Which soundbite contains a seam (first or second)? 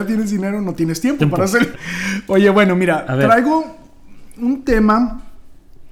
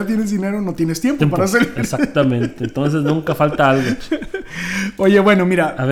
first